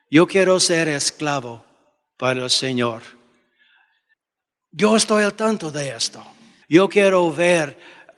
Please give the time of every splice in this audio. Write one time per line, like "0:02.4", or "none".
0:06.6